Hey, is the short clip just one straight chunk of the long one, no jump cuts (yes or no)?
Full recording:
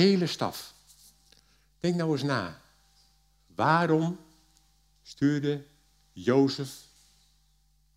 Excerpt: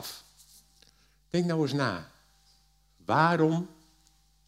yes